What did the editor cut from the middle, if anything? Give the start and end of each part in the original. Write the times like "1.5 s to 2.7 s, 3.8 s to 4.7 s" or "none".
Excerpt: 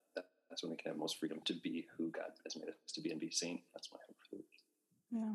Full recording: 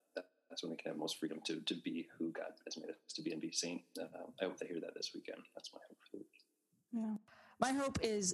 1.4 s to 1.6 s, 3.9 s to 5.5 s